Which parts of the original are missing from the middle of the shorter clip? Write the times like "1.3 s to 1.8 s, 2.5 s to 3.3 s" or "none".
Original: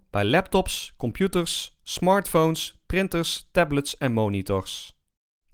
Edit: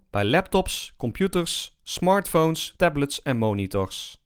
2.8 s to 3.5 s